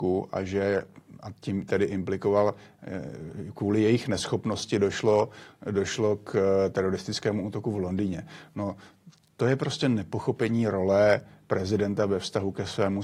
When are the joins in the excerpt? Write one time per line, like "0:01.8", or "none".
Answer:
none